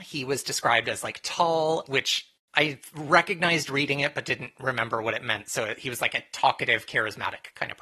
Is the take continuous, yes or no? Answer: no